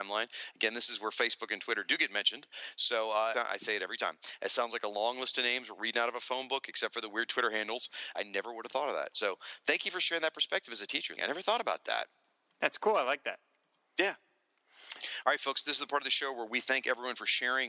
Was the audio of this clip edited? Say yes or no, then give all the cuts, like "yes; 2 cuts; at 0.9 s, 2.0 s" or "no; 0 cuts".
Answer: yes; 3 cuts; at 3.3 s, 8.1 s, 11.2 s